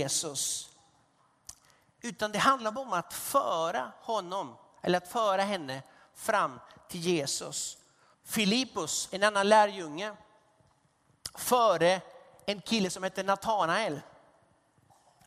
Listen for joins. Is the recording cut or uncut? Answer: cut